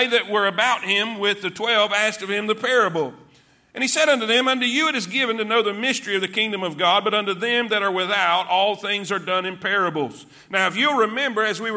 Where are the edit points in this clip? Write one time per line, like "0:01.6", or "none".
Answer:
none